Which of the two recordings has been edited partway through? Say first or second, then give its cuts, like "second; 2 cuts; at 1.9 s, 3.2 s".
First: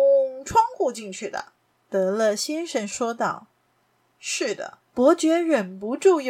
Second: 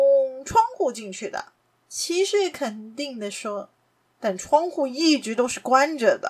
first; 2 cuts; at 1.6 s, 4.8 s